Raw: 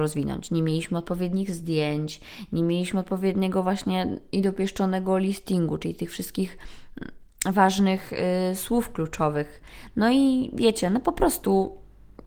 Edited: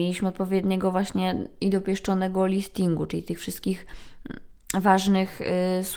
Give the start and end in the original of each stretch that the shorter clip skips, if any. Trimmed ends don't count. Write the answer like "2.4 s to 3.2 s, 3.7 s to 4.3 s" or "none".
none